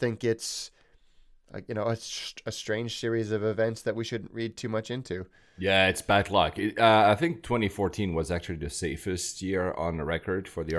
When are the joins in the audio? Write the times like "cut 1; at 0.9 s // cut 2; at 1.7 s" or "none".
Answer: none